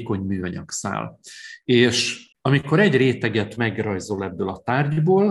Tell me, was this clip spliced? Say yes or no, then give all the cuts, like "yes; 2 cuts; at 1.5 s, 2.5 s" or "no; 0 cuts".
yes; 1 cut; at 2.3 s